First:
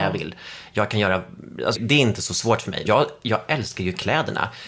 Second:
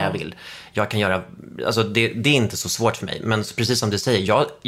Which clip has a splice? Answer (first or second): first